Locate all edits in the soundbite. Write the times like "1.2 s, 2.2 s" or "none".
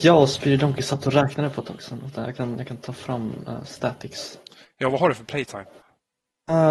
none